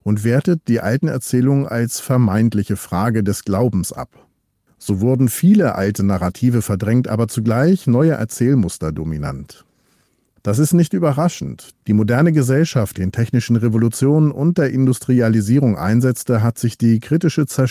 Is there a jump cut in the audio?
yes; 2 cuts; at 11.7 s, 12.9 s

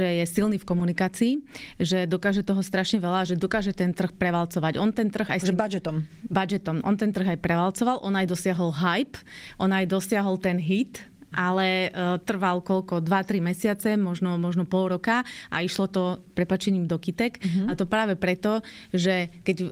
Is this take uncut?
yes; 0 cuts

